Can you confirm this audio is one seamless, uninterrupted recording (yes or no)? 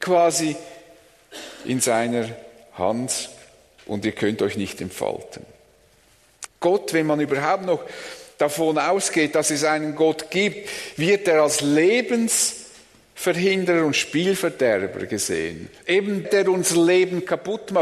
no